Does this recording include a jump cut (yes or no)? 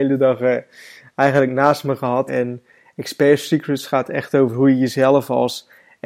yes